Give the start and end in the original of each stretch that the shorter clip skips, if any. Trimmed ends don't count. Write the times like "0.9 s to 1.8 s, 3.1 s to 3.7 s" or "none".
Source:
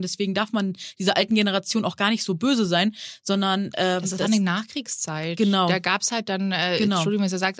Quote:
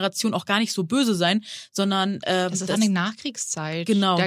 none